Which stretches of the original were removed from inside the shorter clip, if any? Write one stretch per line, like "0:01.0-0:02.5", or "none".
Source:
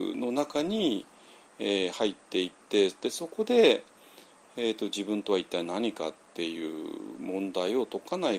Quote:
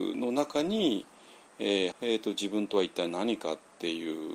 0:01.9-0:04.5